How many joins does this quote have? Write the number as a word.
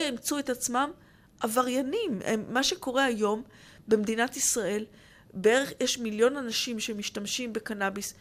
zero